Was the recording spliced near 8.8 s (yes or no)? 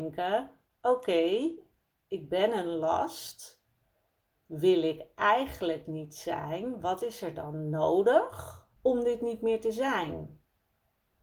yes